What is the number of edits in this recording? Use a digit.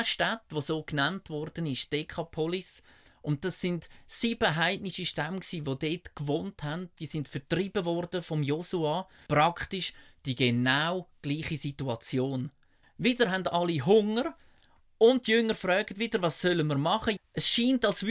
3